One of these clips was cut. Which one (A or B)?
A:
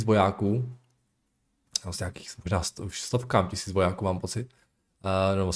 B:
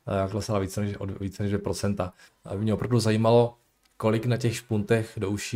B